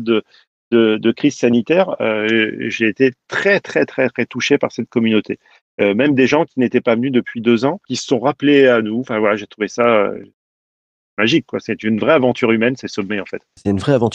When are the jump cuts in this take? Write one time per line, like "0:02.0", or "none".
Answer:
none